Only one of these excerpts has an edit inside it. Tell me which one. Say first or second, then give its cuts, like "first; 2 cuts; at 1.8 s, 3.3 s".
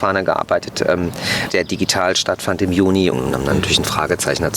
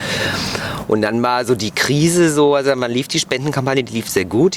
first; 2 cuts; at 1.5 s, 3.1 s